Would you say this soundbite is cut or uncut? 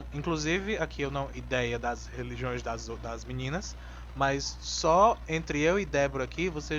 cut